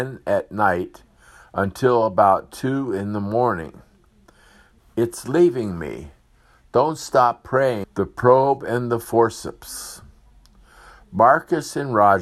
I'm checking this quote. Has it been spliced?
yes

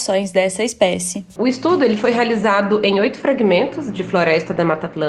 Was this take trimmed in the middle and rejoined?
no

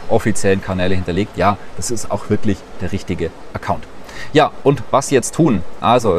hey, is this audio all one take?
no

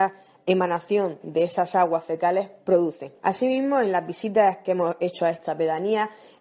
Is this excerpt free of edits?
yes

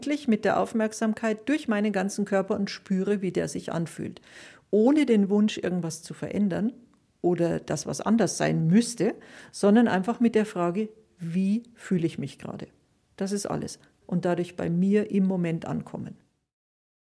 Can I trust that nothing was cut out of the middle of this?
yes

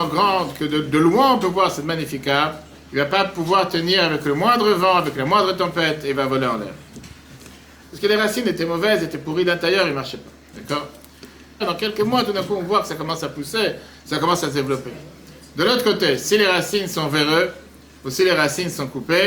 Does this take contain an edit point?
yes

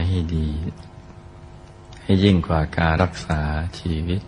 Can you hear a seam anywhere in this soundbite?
yes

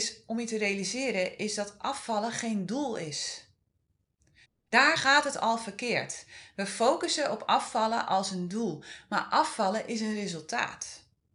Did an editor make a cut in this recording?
no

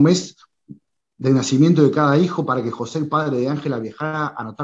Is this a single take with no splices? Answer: yes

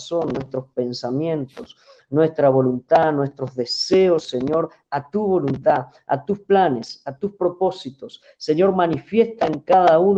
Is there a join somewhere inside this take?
no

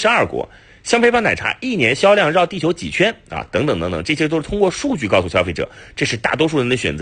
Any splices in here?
no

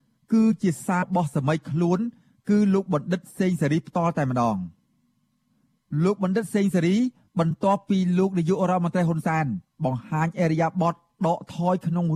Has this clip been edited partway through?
yes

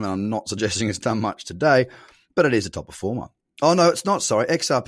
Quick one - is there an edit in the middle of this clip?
no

